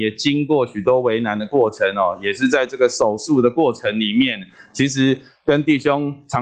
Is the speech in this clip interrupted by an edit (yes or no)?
no